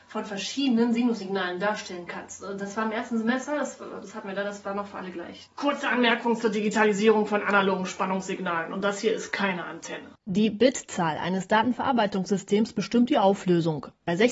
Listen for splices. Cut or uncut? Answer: cut